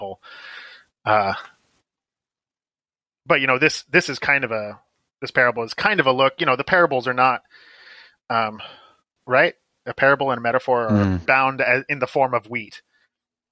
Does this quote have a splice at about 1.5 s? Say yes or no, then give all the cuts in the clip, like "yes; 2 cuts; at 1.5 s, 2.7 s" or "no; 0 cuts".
no; 2 cuts; at 9.2 s, 11.3 s